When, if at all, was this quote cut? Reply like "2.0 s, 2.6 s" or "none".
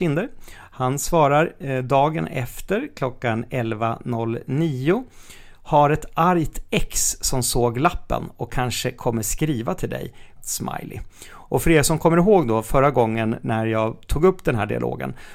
10.4 s